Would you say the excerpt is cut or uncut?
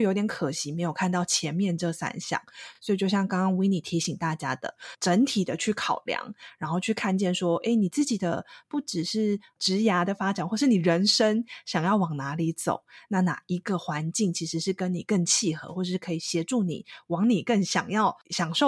uncut